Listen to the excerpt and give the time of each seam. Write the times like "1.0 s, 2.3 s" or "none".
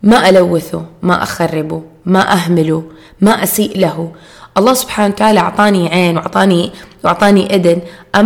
none